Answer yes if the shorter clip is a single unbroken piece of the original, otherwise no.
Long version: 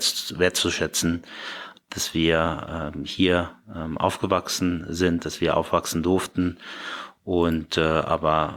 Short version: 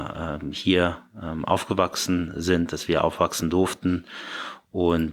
yes